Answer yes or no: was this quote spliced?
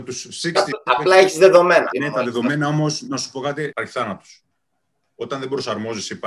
yes